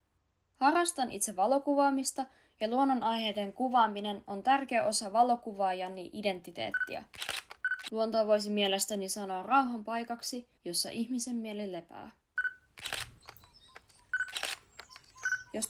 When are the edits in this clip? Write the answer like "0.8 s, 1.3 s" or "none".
7.9 s, 10.6 s